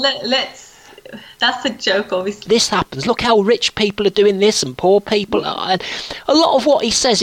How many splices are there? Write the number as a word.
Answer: one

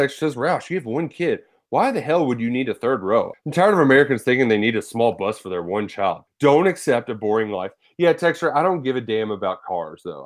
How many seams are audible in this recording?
two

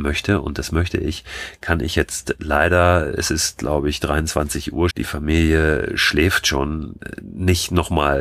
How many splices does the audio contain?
one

